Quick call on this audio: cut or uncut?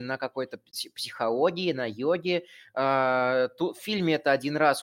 uncut